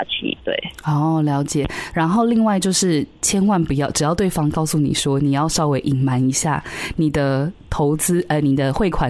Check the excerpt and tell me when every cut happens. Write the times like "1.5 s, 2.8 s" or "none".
1.9 s